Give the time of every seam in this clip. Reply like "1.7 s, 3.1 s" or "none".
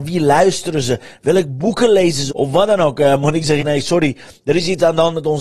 2.3 s, 3.6 s

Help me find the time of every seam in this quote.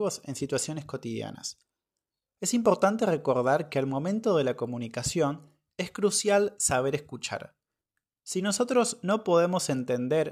none

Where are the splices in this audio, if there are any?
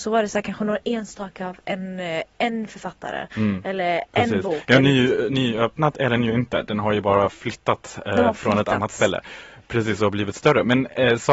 none

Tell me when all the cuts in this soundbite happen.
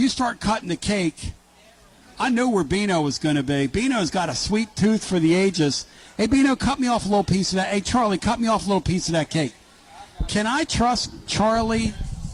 none

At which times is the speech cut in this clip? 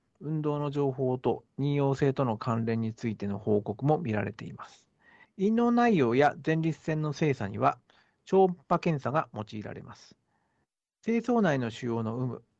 5.2 s

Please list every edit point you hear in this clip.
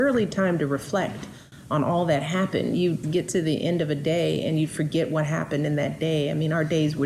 3.0 s

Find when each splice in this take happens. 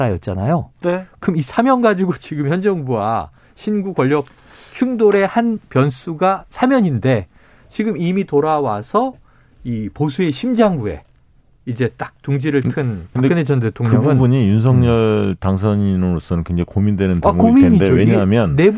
none

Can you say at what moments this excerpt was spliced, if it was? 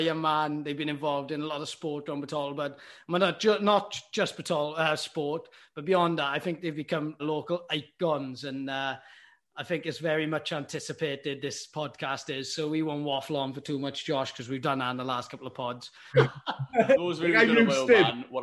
7.2 s, 16.1 s

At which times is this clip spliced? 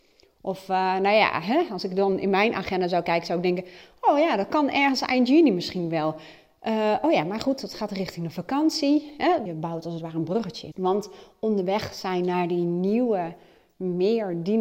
9.5 s, 10.7 s

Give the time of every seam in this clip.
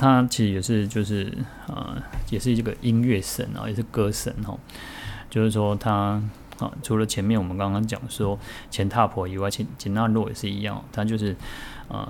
6.8 s, 9.5 s

